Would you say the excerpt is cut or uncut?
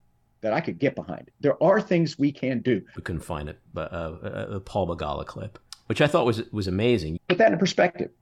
cut